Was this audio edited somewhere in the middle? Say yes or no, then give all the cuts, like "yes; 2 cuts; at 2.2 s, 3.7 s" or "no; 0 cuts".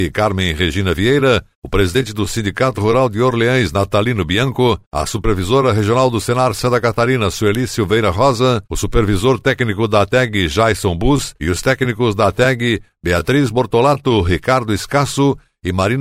no; 0 cuts